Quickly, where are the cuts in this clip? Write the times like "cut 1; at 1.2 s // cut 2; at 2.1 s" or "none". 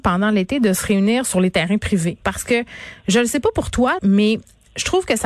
cut 1; at 2.2 s // cut 2; at 4.0 s